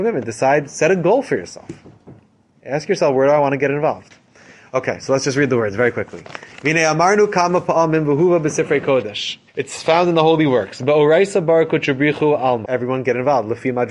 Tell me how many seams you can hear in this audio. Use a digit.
2